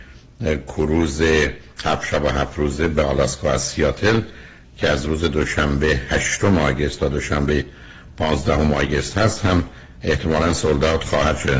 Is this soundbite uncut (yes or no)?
yes